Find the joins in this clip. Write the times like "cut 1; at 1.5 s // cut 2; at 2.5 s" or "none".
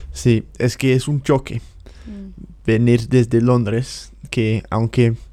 none